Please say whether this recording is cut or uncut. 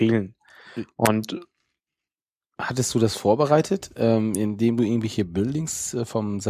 uncut